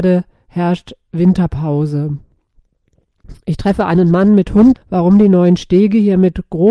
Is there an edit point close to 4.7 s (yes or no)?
yes